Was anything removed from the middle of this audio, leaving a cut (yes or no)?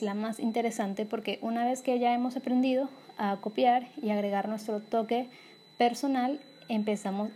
no